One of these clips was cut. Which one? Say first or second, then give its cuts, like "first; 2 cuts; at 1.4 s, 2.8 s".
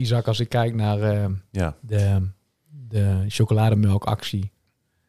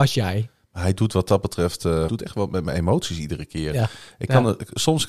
second; 1 cut; at 2.1 s